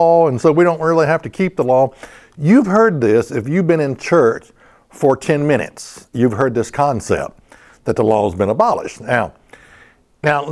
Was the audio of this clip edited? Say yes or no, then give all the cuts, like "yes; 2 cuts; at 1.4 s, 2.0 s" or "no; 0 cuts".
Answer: no; 0 cuts